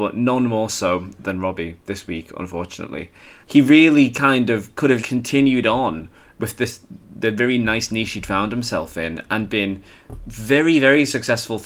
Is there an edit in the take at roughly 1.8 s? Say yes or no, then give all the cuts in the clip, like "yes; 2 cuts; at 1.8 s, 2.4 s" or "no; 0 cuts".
no; 2 cuts; at 3.4 s, 5.0 s